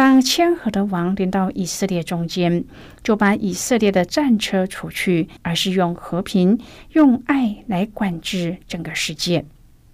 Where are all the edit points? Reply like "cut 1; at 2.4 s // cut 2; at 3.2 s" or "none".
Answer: cut 1; at 5.4 s

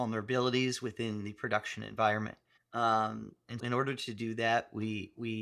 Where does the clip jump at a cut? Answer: cut 1; at 2.6 s // cut 2; at 3.6 s

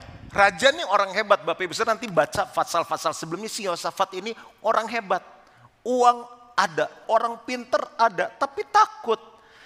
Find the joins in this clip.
cut 1; at 7.0 s

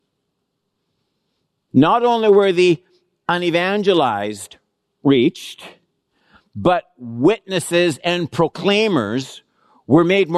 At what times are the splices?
cut 1; at 1.7 s

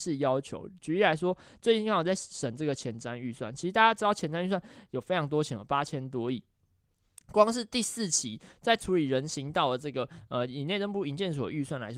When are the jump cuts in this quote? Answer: none

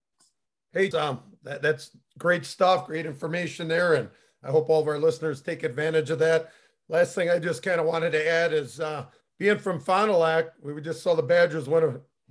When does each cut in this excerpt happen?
cut 1; at 0.9 s

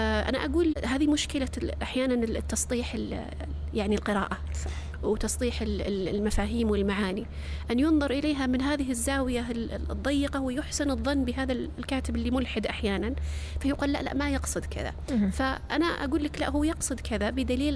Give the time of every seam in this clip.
none

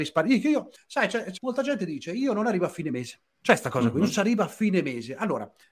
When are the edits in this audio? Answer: cut 1; at 1.4 s

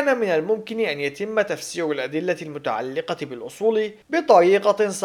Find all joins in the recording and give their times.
cut 1; at 4.0 s

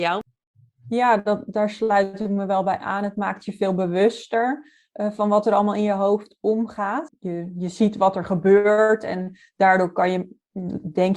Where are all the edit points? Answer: cut 1; at 7.1 s

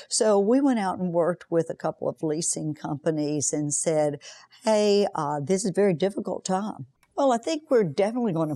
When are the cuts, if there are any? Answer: cut 1; at 7.0 s

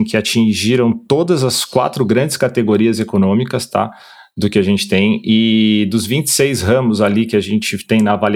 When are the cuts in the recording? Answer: none

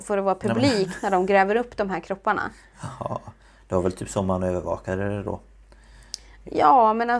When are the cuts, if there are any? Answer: none

